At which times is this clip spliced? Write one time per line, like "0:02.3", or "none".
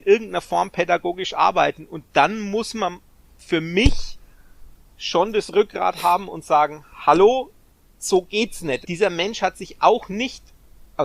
0:08.8